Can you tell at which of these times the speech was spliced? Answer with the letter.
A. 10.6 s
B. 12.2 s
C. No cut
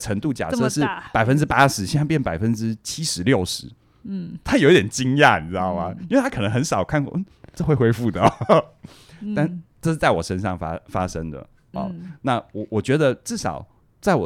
C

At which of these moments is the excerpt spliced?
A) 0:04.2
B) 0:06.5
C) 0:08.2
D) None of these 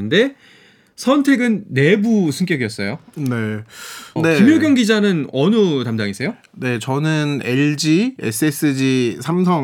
A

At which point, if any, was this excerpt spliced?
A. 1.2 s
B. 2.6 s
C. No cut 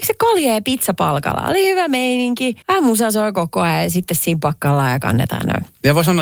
B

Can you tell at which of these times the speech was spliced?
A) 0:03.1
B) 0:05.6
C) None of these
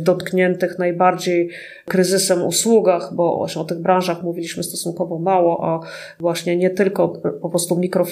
C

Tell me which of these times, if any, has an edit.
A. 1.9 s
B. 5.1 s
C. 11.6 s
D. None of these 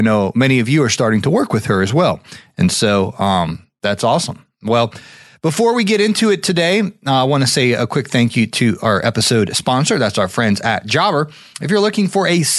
D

